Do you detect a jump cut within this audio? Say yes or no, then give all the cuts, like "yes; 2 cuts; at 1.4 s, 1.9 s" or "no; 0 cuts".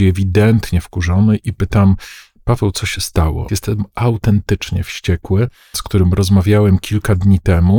yes; 2 cuts; at 3.5 s, 5.7 s